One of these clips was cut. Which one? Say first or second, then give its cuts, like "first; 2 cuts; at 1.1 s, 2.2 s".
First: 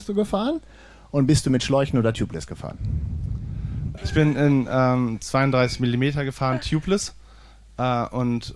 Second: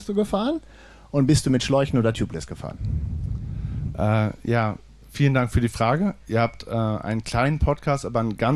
first; 1 cut; at 4.0 s